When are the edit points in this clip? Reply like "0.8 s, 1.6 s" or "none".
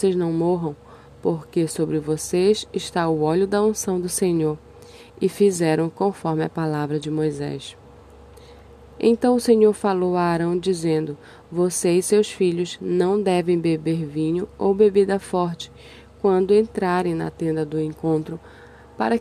none